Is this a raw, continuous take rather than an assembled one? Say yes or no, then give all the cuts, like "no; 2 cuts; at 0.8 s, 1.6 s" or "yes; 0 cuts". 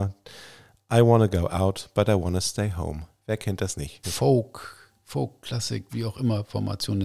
no; 2 cuts; at 4.0 s, 5.9 s